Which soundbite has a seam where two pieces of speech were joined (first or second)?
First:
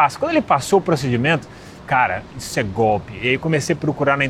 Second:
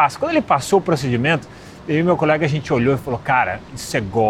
first